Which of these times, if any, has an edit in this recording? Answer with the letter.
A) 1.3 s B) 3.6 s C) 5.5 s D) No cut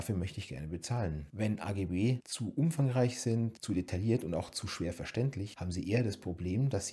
D